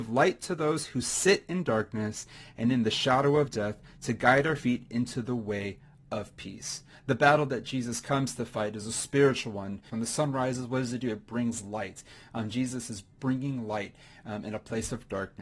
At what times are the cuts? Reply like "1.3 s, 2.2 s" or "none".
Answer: 9.9 s